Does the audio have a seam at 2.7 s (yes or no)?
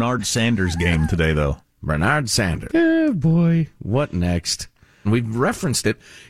yes